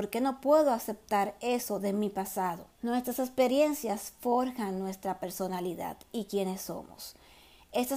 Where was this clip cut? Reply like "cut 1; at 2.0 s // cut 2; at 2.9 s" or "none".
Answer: cut 1; at 2.7 s